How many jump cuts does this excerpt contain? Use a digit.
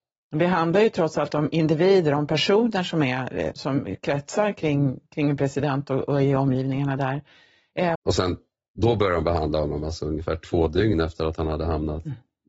2